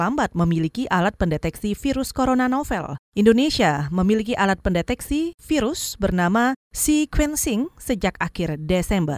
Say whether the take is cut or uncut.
uncut